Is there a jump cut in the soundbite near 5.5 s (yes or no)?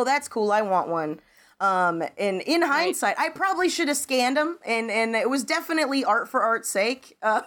no